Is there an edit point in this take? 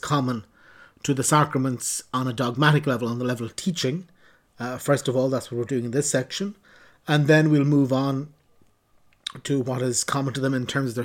no; 0 cuts

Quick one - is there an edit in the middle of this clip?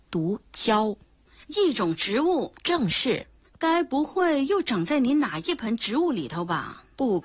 no; 0 cuts

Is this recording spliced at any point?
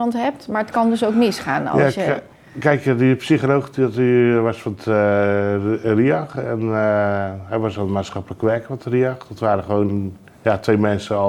no; 0 cuts

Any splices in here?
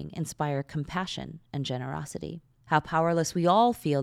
yes; 1 cut; at 2.6 s

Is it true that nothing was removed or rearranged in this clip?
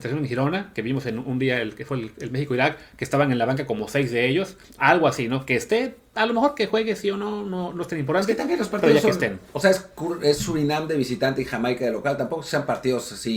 no; 1 cut; at 4.8 s

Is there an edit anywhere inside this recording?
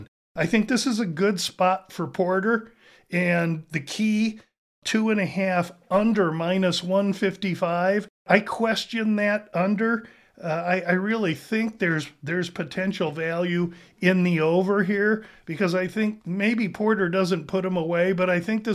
no; 0 cuts

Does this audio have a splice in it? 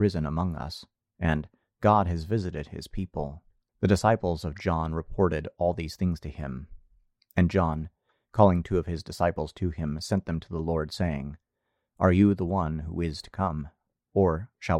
yes; 1 cut; at 3.7 s

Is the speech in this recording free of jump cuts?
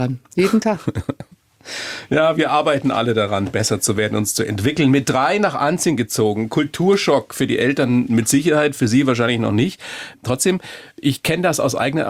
yes; 0 cuts

